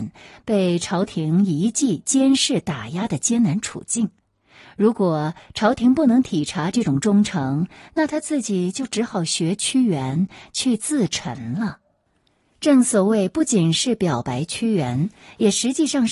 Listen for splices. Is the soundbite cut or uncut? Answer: uncut